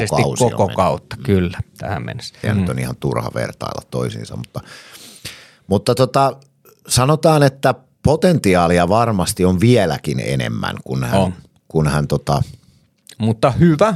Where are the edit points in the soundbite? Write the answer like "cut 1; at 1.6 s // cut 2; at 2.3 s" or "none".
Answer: cut 1; at 2.4 s